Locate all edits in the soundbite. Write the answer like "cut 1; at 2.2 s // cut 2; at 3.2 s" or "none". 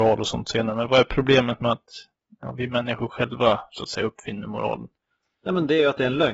none